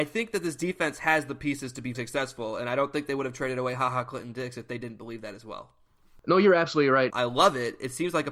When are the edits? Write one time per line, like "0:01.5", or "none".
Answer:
0:01.9
0:07.1